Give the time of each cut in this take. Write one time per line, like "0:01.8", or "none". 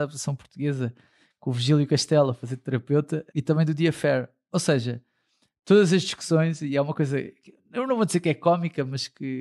0:03.3